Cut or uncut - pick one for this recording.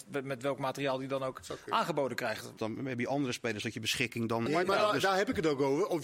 cut